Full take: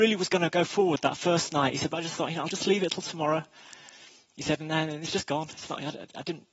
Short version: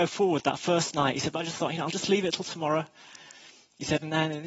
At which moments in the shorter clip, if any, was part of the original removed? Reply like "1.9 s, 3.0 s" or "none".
none